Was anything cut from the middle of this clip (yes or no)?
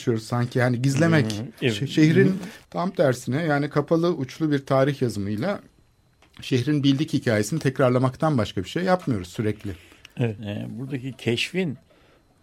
yes